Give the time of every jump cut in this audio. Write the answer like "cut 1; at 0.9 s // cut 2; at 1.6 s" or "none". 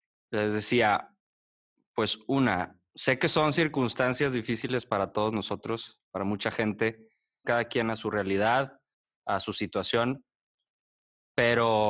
cut 1; at 7.4 s